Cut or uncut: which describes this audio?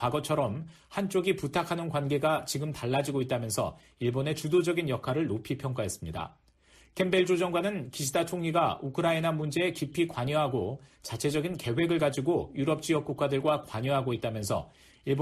uncut